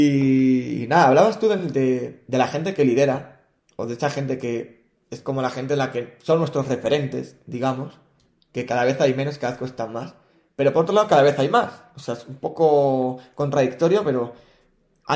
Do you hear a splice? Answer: no; 0 cuts

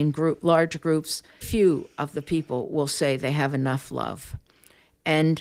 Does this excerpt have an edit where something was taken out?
yes; 1 cut; at 1.4 s

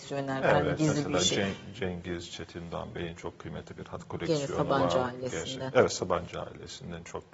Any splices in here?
no; 0 cuts

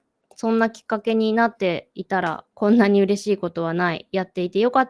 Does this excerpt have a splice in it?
yes; 1 cut; at 2.5 s

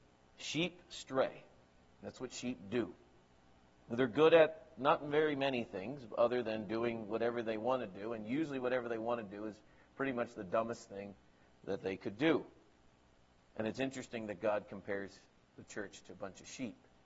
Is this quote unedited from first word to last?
yes; 0 cuts

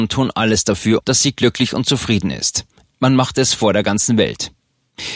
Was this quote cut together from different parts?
yes; 2 cuts; at 1.0 s, 2.9 s

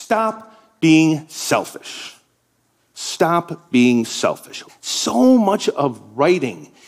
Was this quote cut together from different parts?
yes; 1 cut; at 4.7 s

